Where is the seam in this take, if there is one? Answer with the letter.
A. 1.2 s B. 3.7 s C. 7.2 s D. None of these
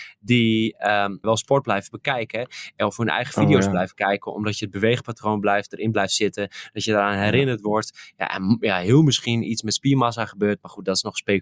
A